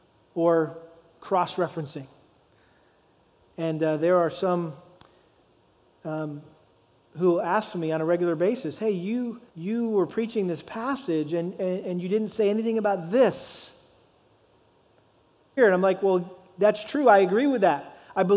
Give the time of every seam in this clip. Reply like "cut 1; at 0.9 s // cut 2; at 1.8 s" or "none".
cut 1; at 9.5 s // cut 2; at 15.6 s